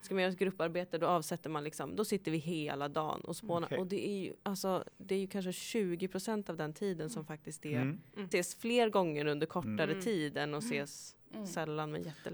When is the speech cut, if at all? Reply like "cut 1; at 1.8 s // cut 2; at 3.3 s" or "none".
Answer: cut 1; at 8.3 s